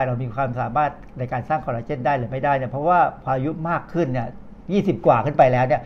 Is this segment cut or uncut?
cut